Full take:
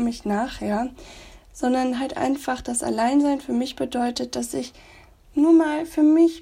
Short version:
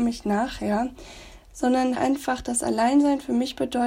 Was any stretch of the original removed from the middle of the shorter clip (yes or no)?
yes